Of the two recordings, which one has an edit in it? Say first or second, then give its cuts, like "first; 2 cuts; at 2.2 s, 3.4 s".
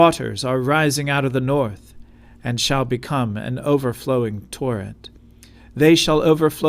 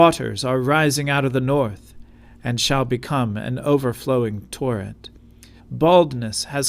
second; 1 cut; at 5.6 s